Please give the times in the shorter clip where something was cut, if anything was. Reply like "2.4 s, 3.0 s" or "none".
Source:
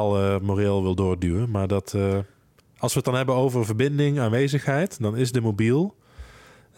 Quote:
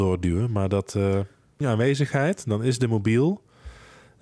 1.6 s